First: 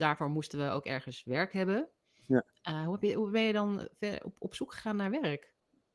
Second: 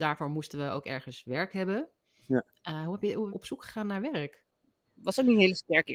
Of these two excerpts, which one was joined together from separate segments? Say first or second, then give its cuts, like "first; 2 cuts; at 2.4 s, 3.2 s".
second; 2 cuts; at 3.3 s, 4.8 s